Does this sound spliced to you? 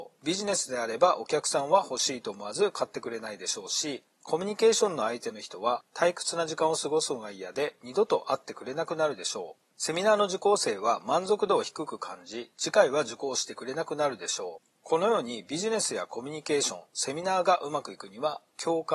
no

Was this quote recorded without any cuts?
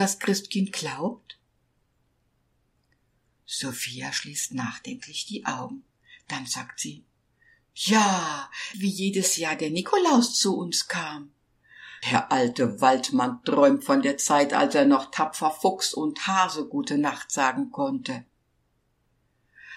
no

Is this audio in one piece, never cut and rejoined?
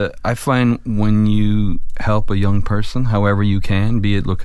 yes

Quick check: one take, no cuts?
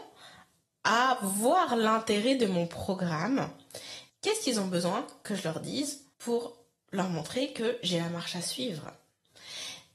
no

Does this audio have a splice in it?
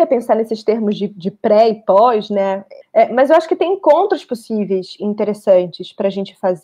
yes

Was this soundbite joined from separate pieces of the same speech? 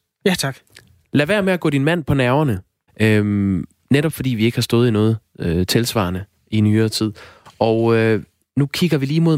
yes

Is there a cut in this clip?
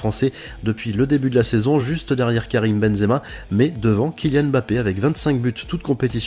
no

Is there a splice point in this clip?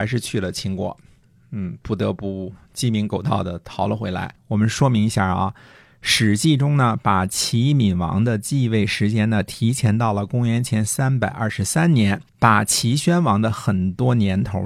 yes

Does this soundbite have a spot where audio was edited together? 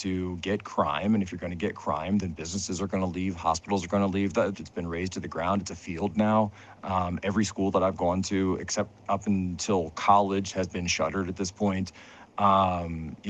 yes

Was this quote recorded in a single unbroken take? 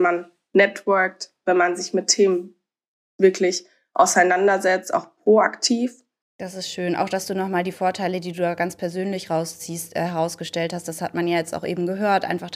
no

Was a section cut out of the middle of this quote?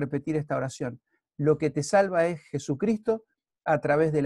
no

